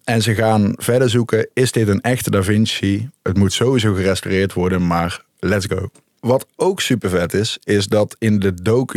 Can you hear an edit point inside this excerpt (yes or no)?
yes